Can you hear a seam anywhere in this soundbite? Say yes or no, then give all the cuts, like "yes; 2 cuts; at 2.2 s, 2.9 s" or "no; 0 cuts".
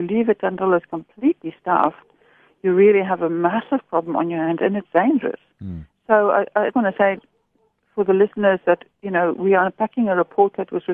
yes; 1 cut; at 6.7 s